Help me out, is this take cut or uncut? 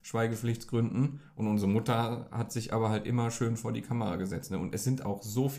uncut